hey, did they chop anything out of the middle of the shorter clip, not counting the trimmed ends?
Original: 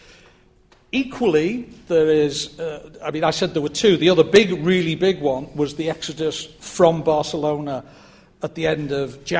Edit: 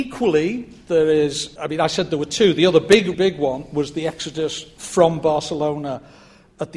yes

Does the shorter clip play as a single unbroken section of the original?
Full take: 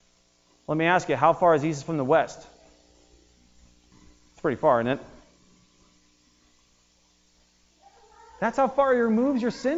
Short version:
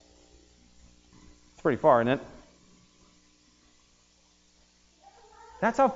yes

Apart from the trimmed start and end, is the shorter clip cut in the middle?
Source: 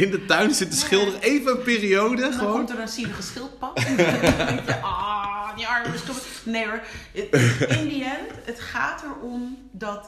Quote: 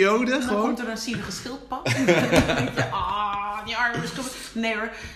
no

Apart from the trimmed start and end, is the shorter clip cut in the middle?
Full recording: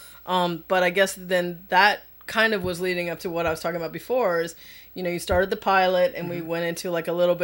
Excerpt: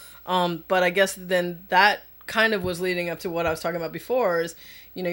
no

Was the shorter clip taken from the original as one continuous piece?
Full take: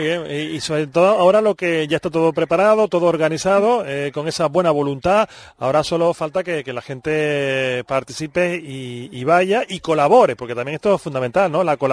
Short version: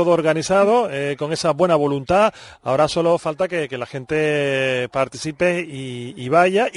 yes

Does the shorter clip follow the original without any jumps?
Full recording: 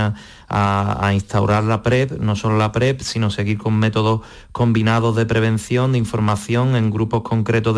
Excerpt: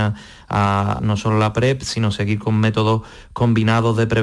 no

